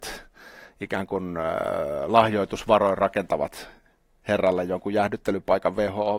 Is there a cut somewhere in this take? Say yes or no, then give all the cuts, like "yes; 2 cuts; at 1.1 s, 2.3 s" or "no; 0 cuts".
no; 0 cuts